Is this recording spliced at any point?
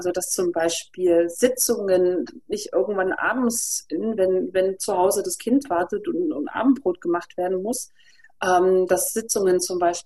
no; 0 cuts

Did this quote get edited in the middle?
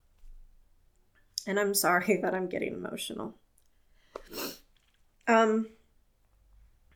no; 0 cuts

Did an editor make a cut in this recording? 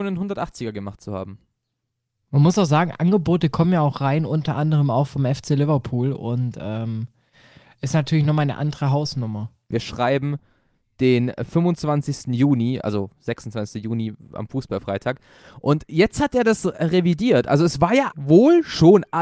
yes; 2 cuts; at 9.7 s, 18.1 s

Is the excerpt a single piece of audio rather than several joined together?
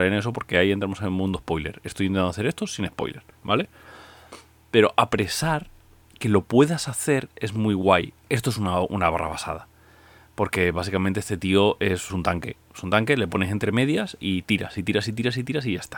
no; 2 cuts; at 8.3 s, 12.1 s

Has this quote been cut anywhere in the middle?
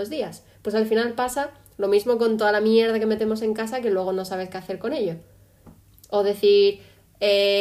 no; 0 cuts

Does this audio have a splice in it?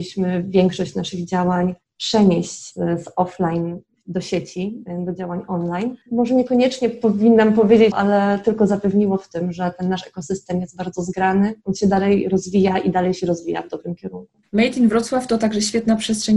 yes; 2 cuts; at 6.0 s, 7.9 s

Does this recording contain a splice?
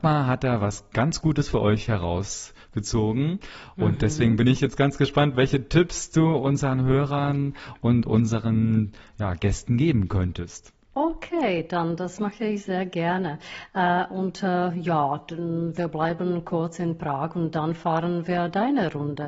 yes; 1 cut; at 13.7 s

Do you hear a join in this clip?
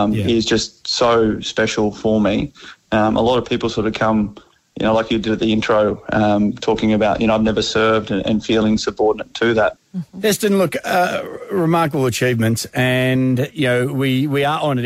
yes; 1 cut; at 9.8 s

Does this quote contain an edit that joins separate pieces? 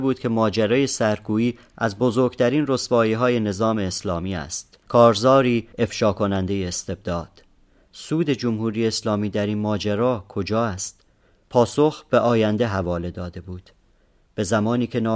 yes; 1 cut; at 4.8 s

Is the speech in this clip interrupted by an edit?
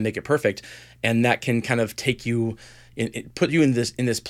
no; 0 cuts

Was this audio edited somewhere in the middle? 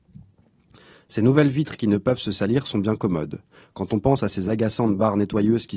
no; 0 cuts

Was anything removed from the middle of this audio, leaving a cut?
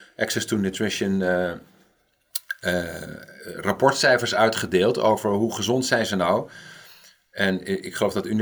no; 0 cuts

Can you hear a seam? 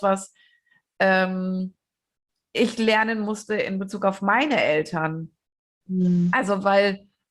no; 0 cuts

